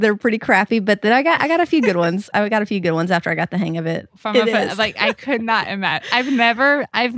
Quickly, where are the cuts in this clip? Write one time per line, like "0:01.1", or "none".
0:04.1